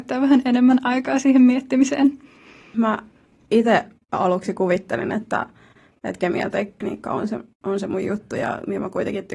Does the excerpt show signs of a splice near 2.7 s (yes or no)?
yes